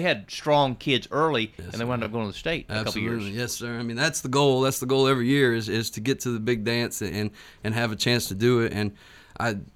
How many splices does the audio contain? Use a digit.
0